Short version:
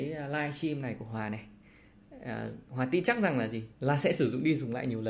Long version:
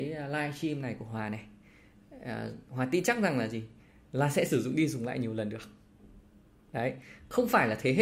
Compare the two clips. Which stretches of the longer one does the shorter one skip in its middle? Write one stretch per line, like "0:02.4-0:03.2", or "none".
0:03.7-0:04.0